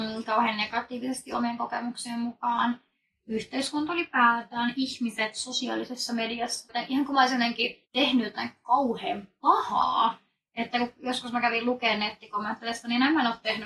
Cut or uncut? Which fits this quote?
cut